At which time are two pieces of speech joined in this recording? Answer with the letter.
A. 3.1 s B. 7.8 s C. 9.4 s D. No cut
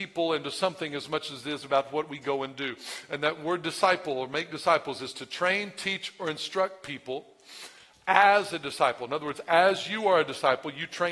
D